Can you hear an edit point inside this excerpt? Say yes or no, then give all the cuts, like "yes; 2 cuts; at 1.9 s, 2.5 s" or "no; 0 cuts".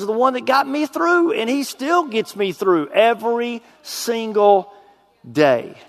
no; 0 cuts